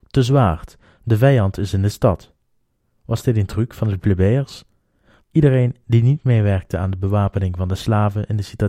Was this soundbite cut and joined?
yes; 2 cuts; at 3.0 s, 5.2 s

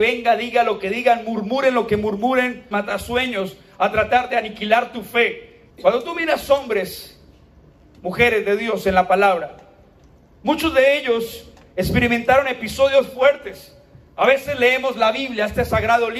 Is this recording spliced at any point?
yes; 2 cuts; at 2.7 s, 5.7 s

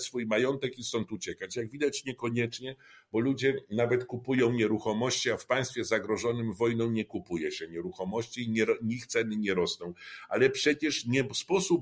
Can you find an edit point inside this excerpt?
no; 0 cuts

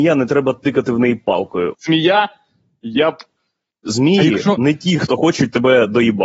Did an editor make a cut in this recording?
yes; 2 cuts; at 1.7 s, 3.7 s

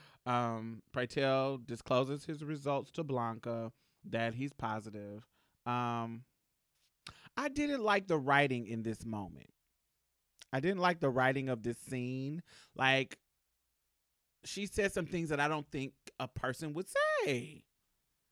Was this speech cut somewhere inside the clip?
no; 0 cuts

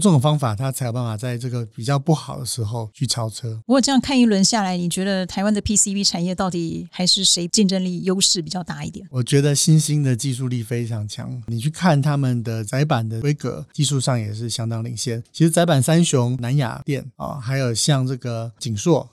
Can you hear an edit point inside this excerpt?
no; 0 cuts

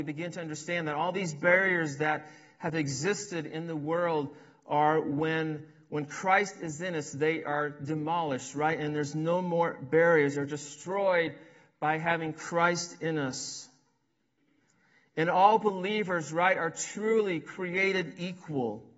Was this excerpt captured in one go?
yes; 0 cuts

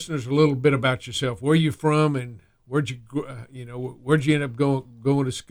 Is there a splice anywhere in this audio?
no; 0 cuts

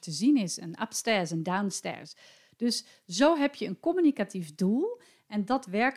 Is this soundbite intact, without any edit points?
yes; 0 cuts

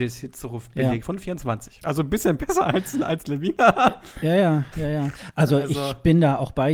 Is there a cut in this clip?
no; 0 cuts

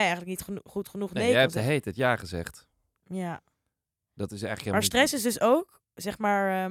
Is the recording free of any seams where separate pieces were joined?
no; 1 cut; at 3.0 s

